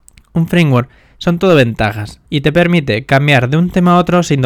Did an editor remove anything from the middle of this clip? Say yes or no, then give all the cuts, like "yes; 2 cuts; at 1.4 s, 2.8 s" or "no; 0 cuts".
yes; 1 cut; at 2.3 s